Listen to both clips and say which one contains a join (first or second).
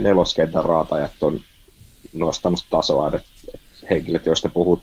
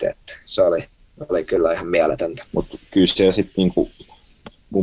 second